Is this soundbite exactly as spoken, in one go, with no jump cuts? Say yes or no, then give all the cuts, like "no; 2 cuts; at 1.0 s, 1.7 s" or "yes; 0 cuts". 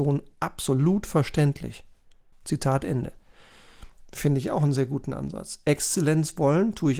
no; 1 cut; at 2.3 s